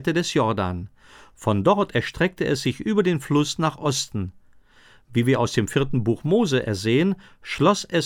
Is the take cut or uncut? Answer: uncut